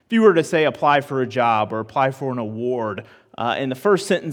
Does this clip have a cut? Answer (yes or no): no